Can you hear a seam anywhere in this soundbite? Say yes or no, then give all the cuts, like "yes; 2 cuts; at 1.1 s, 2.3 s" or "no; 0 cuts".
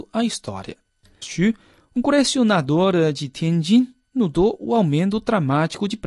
yes; 1 cut; at 1.2 s